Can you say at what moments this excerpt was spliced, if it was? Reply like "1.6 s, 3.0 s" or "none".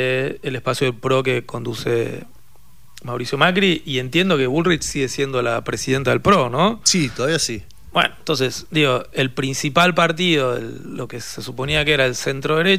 none